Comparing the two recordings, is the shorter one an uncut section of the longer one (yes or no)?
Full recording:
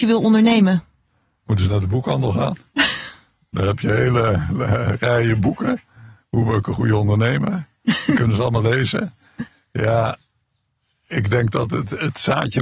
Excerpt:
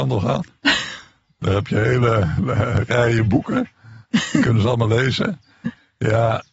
no